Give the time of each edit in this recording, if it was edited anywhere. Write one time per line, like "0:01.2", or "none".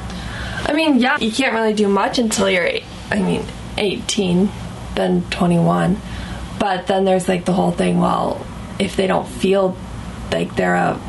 0:01.2